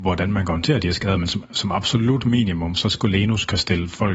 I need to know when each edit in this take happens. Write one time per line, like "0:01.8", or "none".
none